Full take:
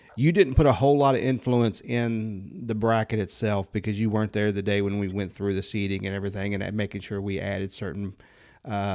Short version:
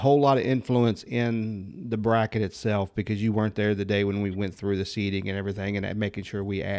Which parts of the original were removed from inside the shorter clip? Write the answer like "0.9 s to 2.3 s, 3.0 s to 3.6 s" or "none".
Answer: none